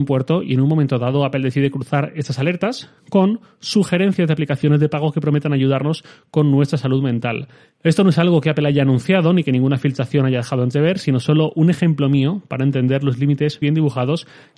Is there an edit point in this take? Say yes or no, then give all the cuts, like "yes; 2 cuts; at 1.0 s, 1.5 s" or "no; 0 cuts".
yes; 1 cut; at 13.6 s